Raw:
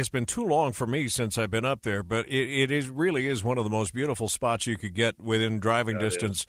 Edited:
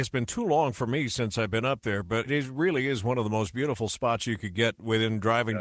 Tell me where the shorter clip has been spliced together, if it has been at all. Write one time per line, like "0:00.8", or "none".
0:02.3